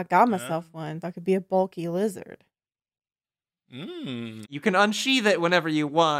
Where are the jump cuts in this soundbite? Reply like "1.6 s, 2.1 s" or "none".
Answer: 1.0 s, 4.4 s